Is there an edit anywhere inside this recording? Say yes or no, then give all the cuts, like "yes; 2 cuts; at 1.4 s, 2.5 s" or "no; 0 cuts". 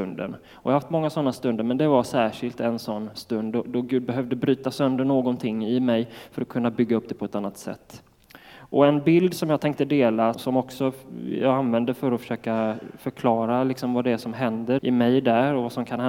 yes; 2 cuts; at 10.3 s, 14.8 s